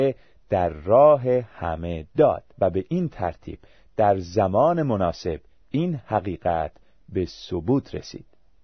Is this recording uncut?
no; 1 cut; at 2.5 s

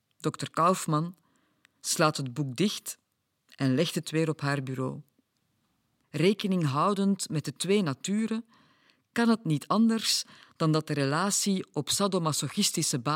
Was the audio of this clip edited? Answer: yes; 1 cut; at 6.0 s

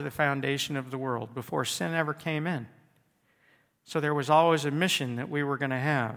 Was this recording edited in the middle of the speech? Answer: no; 0 cuts

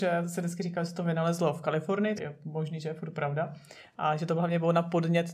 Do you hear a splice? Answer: yes; 1 cut; at 2.1 s

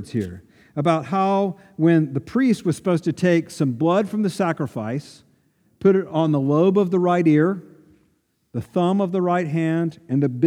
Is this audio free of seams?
yes; 0 cuts

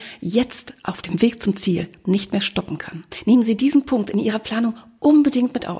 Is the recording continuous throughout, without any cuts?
yes; 0 cuts

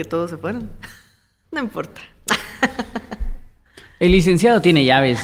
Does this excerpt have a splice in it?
yes; 1 cut; at 1.4 s

